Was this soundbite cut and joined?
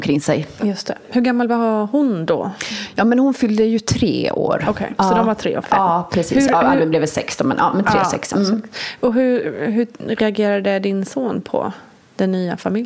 no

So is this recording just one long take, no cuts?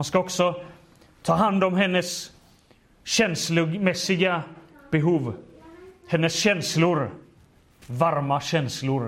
no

